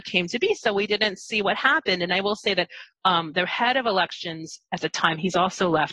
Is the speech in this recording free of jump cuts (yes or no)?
yes